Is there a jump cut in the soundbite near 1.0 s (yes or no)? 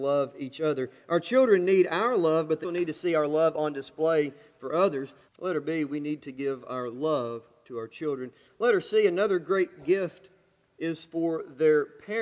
no